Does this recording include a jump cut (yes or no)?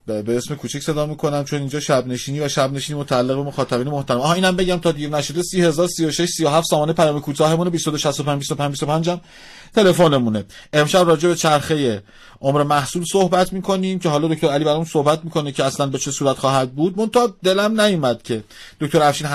no